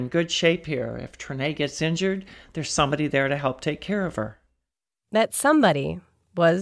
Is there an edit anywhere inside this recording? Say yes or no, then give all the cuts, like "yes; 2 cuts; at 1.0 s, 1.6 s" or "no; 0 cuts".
no; 0 cuts